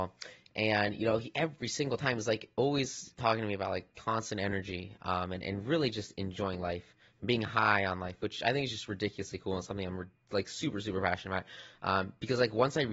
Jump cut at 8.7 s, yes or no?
no